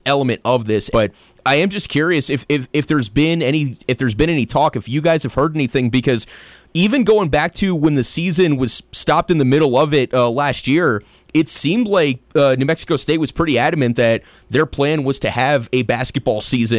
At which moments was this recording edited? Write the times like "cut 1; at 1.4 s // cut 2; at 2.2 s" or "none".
cut 1; at 0.9 s